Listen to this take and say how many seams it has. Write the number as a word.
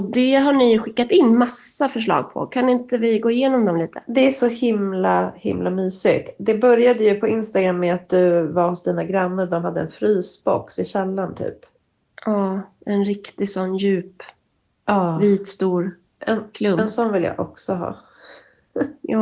zero